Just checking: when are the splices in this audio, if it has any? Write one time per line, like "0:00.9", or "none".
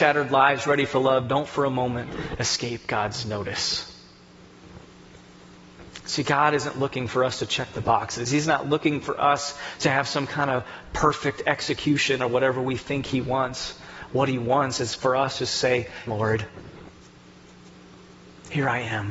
0:16.1